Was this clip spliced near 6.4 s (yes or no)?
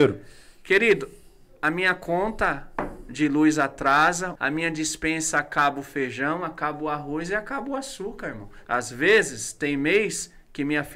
no